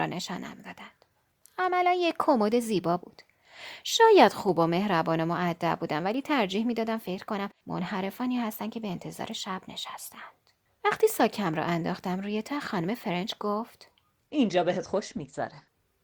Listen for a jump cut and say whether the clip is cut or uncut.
uncut